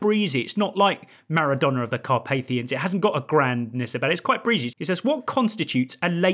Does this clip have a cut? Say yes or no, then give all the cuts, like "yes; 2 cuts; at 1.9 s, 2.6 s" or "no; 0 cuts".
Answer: yes; 1 cut; at 4.7 s